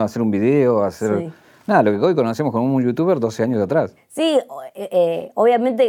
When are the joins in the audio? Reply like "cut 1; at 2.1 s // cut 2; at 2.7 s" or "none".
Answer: cut 1; at 4.0 s